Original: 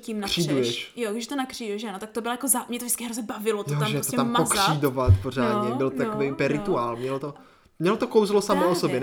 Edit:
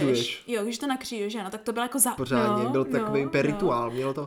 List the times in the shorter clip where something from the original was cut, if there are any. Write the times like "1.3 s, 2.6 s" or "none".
2.2 s